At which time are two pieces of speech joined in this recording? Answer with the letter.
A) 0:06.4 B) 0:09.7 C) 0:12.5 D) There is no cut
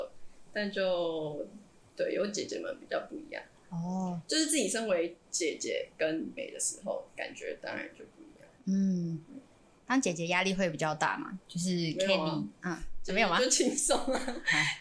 A